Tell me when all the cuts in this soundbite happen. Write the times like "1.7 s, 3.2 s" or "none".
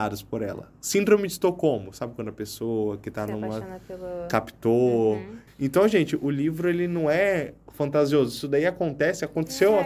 5.5 s